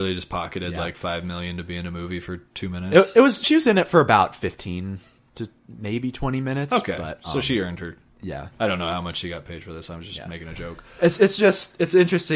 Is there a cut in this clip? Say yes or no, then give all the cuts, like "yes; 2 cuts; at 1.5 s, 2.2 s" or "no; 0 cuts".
no; 0 cuts